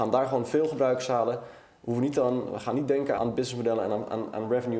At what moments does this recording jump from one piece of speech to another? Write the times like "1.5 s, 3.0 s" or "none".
3.2 s